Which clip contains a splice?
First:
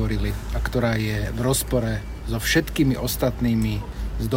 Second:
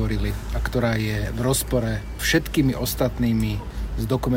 second; 1 cut; at 2.2 s

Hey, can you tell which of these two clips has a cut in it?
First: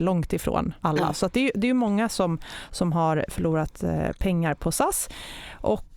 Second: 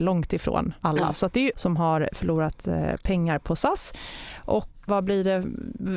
second; 2 cuts; at 1.5 s, 4.9 s

